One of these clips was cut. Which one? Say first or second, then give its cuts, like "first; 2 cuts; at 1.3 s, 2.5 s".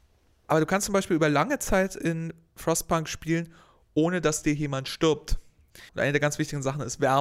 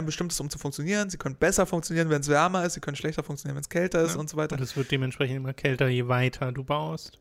first; 1 cut; at 5.9 s